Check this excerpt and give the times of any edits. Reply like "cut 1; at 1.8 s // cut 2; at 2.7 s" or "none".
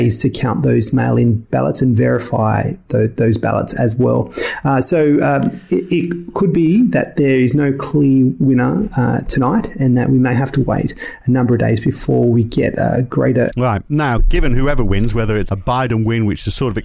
cut 1; at 13.5 s // cut 2; at 15.5 s

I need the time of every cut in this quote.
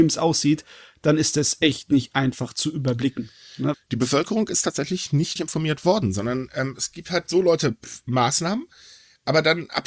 cut 1; at 3.7 s // cut 2; at 5.4 s

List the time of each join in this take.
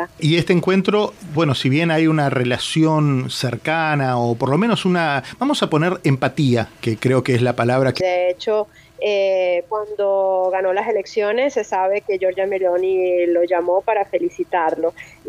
cut 1; at 1.3 s // cut 2; at 8.0 s

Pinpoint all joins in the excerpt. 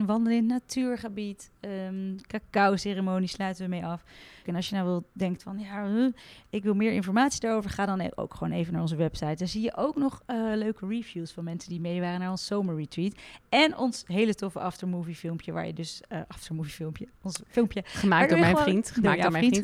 cut 1; at 4.4 s

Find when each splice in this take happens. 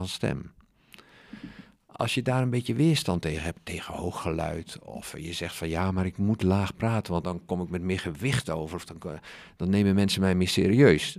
cut 1; at 7.2 s

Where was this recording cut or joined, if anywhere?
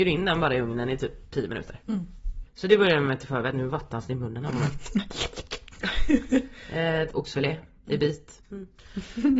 cut 1; at 2.5 s // cut 2; at 7.1 s // cut 3; at 8.4 s

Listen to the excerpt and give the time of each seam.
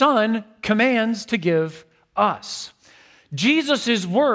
none

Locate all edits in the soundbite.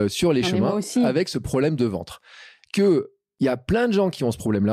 none

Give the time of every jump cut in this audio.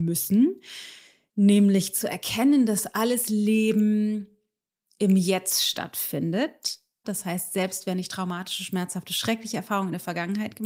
cut 1; at 7.0 s

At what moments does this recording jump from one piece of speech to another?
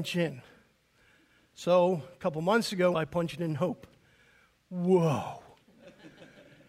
cut 1; at 2.9 s

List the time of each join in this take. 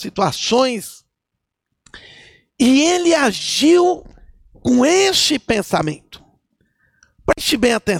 none

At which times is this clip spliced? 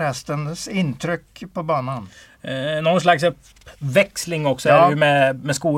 none

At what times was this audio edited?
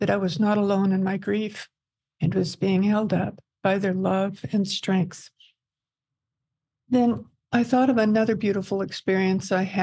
none

